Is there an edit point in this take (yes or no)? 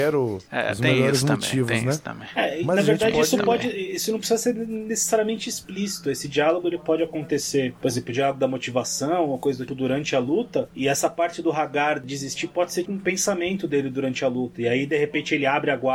yes